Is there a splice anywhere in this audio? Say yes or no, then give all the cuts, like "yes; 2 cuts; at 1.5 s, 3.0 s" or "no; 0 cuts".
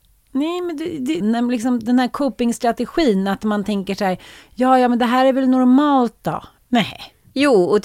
yes; 2 cuts; at 1.2 s, 6.6 s